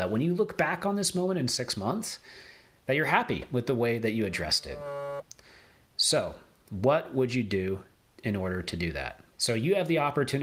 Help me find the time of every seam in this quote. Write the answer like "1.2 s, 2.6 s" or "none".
9.3 s